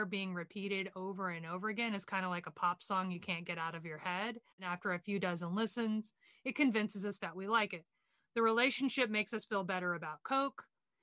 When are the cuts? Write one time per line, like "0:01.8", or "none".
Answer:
0:04.5